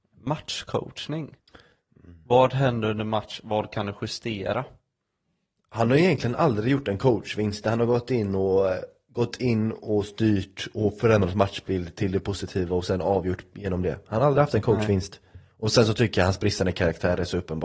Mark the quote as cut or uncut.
uncut